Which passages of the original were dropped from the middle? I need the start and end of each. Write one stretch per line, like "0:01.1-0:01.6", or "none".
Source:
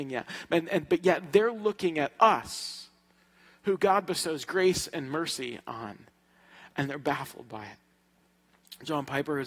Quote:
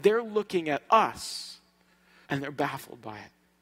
0:03.6-0:06.7